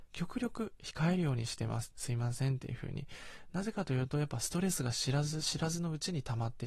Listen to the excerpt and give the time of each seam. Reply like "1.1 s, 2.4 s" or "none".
none